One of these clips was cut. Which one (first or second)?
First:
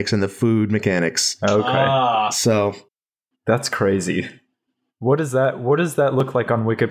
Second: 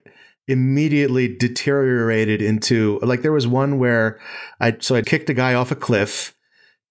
second